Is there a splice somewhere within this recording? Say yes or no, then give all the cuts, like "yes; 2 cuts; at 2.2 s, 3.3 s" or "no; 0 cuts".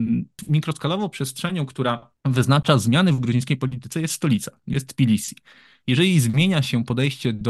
no; 0 cuts